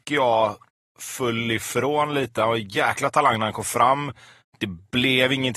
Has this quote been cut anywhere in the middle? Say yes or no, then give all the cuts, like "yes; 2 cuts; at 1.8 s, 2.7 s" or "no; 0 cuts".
no; 0 cuts